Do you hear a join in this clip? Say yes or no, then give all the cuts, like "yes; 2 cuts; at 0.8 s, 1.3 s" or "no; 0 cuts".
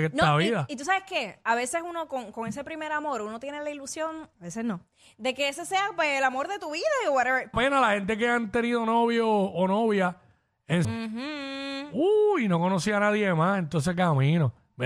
yes; 3 cuts; at 4.3 s, 7.5 s, 10.8 s